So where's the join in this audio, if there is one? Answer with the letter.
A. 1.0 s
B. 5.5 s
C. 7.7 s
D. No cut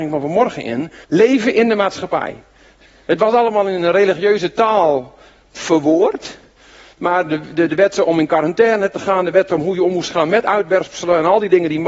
A